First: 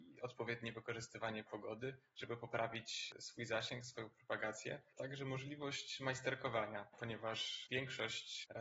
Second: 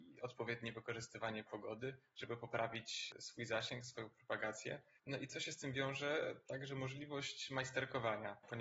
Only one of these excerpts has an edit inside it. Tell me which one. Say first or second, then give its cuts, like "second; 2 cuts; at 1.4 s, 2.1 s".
first; 1 cut; at 4.9 s